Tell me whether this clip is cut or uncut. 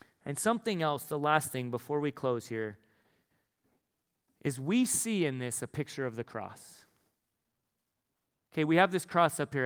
uncut